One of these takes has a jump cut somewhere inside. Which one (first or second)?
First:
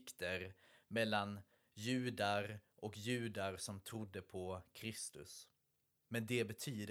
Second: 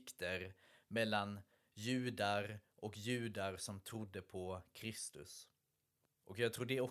first